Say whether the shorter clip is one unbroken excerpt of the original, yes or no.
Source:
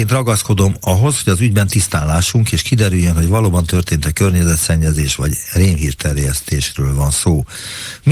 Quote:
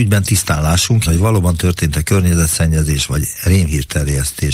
no